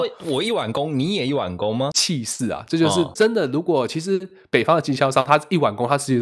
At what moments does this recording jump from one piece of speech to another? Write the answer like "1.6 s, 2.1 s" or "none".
1.9 s, 3.1 s